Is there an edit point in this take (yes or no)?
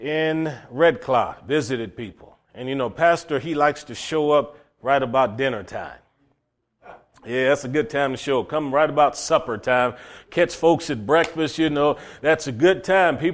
no